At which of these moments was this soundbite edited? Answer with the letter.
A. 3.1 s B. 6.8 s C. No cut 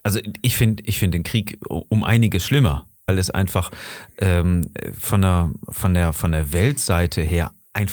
A